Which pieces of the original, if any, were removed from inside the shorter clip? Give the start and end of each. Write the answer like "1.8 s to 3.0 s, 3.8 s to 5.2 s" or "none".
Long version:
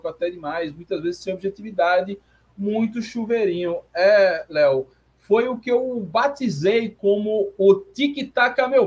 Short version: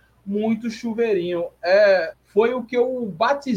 4.4 s to 5.1 s